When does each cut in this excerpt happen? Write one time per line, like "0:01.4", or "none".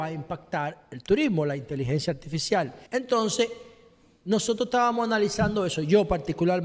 0:02.9

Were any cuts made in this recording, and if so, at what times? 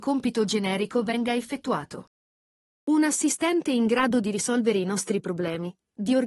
none

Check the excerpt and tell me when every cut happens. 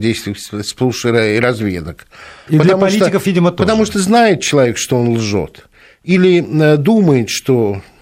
0:02.5

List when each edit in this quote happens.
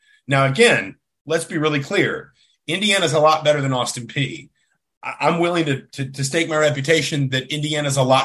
none

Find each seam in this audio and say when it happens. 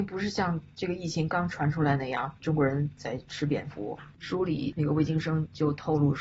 0:02.4
0:04.1

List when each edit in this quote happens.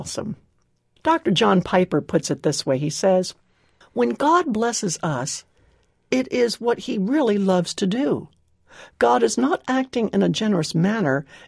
none

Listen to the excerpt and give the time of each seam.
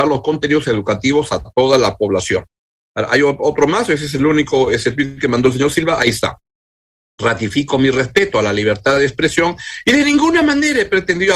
none

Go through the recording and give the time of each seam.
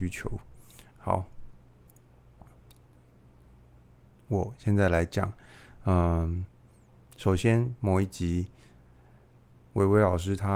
none

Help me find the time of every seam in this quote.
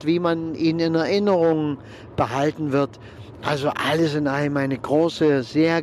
none

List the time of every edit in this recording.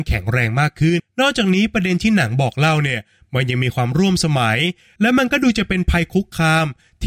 0:01.0

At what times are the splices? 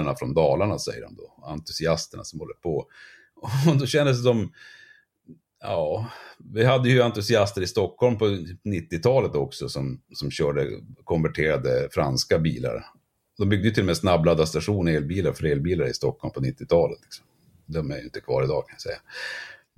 none

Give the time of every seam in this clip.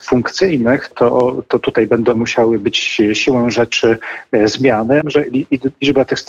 0:00.9
0:05.0

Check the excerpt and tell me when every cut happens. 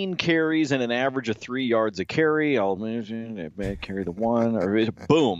none

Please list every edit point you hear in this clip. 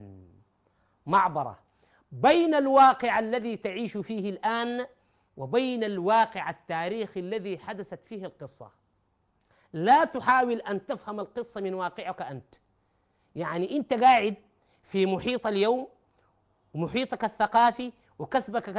none

